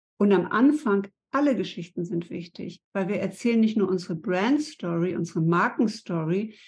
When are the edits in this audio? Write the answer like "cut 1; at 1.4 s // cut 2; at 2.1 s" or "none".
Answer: none